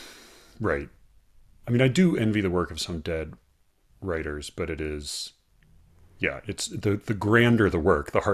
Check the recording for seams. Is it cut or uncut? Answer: uncut